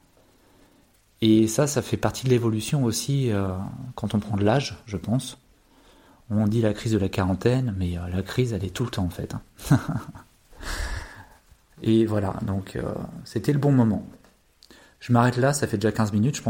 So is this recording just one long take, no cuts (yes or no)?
yes